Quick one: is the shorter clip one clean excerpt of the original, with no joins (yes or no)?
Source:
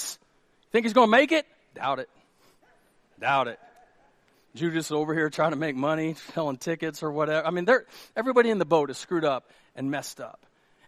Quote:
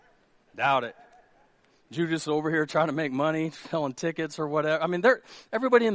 yes